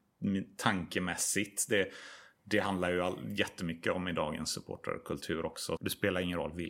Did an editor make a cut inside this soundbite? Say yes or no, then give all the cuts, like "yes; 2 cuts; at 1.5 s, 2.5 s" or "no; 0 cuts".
yes; 1 cut; at 5.8 s